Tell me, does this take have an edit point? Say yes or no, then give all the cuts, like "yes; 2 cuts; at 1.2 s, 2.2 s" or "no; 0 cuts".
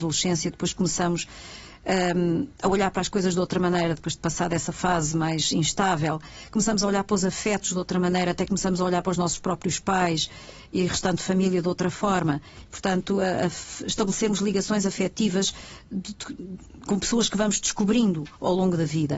yes; 1 cut; at 12.6 s